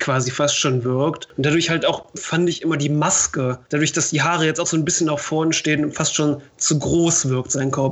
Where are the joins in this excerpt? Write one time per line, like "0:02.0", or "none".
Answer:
none